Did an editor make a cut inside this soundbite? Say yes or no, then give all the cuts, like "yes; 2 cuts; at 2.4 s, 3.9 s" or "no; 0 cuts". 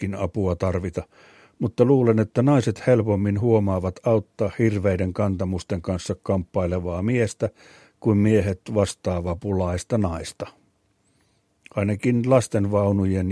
no; 0 cuts